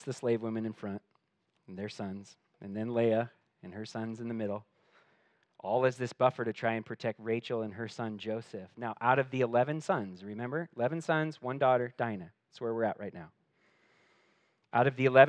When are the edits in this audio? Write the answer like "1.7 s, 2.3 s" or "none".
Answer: none